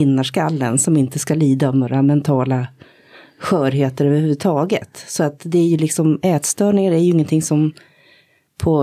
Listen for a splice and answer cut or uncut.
uncut